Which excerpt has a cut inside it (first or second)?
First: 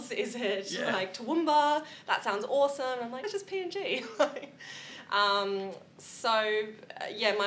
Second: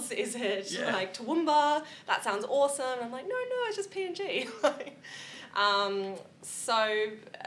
first